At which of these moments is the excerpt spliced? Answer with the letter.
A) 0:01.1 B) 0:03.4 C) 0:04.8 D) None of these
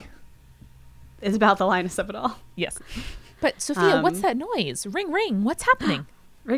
B